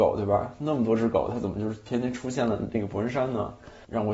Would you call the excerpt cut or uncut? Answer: uncut